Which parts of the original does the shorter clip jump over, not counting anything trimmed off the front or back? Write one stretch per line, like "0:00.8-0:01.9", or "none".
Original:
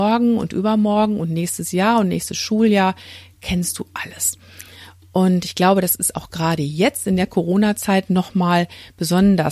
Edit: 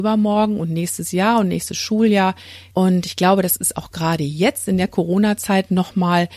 0:03.3-0:05.1